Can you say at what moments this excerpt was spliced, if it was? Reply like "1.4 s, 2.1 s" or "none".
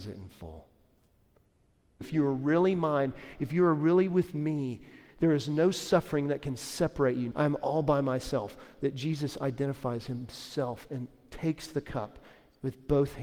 2.0 s, 3.4 s, 7.3 s